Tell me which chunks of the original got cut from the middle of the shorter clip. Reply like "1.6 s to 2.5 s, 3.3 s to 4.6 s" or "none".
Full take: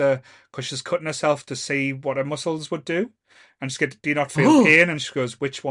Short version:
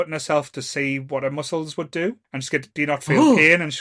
3.2 s to 3.5 s